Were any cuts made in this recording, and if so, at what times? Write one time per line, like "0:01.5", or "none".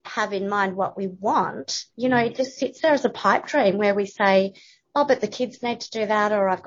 0:01.9